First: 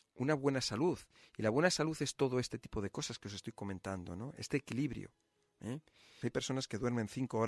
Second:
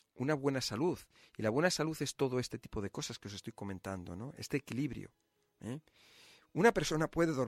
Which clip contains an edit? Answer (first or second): first